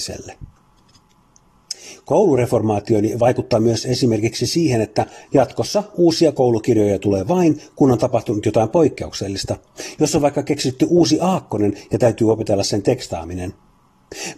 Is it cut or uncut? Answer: uncut